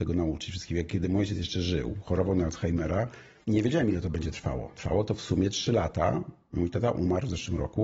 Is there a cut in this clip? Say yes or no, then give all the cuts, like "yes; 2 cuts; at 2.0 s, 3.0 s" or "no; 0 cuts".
yes; 1 cut; at 3.4 s